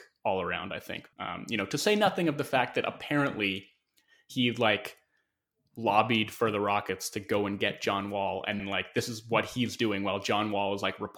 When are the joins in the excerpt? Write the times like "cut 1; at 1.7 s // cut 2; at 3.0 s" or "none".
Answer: cut 1; at 1.1 s // cut 2; at 8.6 s